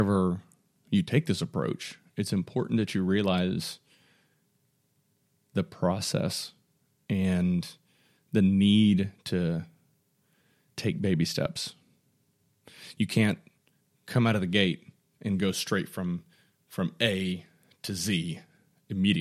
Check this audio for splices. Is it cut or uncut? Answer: uncut